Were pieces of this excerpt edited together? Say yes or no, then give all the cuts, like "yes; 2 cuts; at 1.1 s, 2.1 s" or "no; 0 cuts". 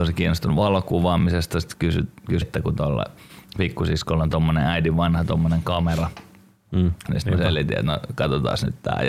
yes; 2 cuts; at 2.4 s, 7.1 s